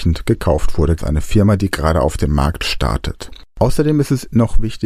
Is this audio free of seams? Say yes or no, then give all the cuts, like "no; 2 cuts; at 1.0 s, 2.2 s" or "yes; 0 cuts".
no; 1 cut; at 1.0 s